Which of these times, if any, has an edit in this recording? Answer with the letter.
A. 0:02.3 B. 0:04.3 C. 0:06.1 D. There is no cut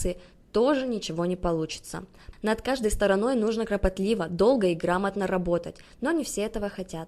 A